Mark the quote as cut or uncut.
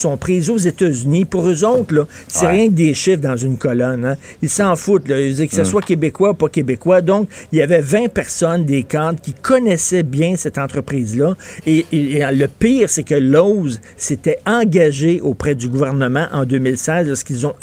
uncut